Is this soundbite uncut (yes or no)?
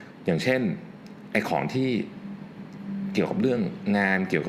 yes